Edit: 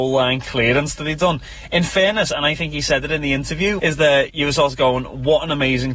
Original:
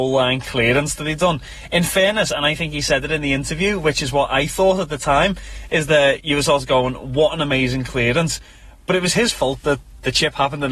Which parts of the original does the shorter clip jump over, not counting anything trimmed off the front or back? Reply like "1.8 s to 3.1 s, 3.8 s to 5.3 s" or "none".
3.8 s to 5.7 s